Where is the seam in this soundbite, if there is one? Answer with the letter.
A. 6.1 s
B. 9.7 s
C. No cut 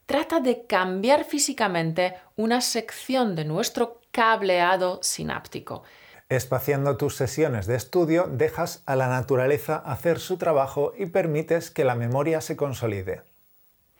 A